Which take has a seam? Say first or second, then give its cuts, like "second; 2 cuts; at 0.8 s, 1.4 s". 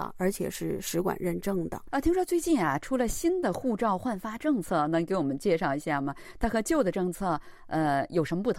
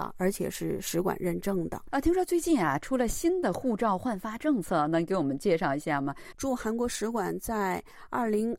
second; 1 cut; at 6.3 s